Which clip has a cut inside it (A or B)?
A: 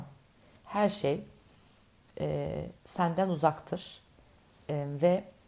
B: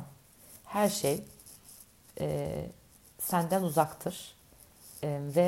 A